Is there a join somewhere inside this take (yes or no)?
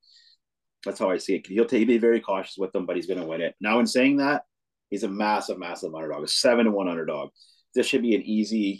yes